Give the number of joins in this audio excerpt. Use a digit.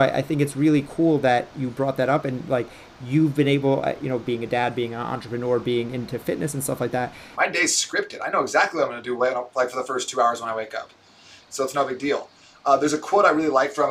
2